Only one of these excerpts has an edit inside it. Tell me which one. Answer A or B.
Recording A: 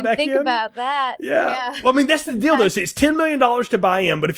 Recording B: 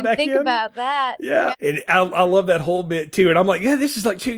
B